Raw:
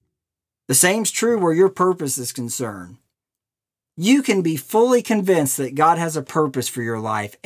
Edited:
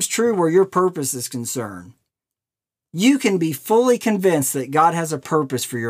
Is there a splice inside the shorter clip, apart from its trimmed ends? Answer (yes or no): no